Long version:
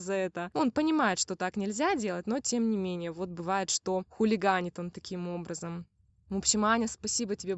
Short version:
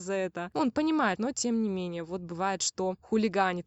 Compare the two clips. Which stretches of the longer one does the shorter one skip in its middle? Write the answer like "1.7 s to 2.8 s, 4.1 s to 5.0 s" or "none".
1.2 s to 2.2 s